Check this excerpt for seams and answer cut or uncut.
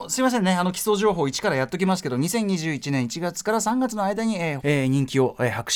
cut